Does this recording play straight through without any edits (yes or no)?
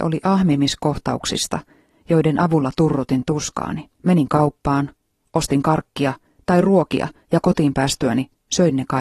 no